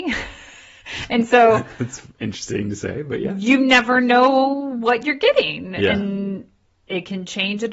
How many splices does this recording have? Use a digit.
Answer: 0